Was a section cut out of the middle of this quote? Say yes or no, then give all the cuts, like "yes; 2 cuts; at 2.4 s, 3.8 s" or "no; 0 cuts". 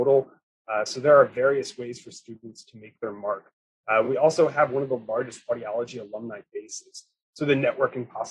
no; 0 cuts